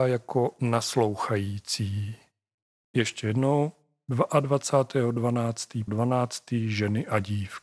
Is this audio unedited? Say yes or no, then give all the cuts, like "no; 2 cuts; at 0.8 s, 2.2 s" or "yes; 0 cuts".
no; 2 cuts; at 2.8 s, 5.9 s